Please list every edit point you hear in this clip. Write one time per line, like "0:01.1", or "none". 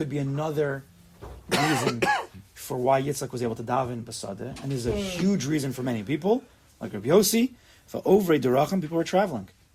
none